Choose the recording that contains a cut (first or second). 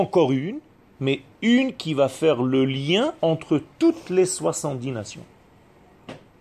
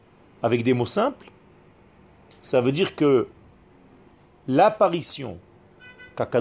first